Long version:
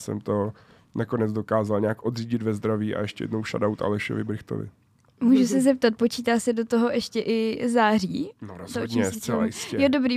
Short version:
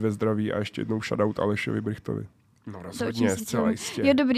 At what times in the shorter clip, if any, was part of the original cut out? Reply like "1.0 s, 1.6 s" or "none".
2.6 s